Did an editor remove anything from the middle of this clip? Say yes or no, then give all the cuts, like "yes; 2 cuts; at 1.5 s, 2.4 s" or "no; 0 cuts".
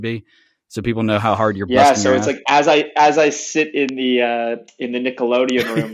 no; 0 cuts